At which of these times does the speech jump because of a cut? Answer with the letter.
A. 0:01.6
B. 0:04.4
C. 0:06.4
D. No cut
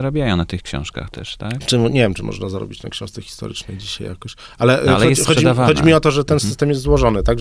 D